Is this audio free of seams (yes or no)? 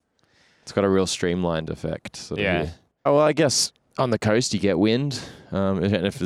no